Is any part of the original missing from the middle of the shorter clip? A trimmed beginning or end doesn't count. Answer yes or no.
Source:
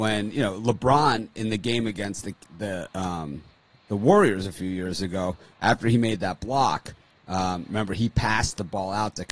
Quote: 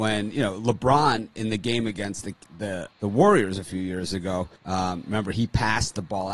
yes